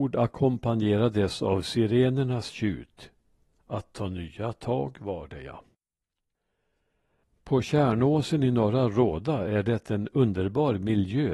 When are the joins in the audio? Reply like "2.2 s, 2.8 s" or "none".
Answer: none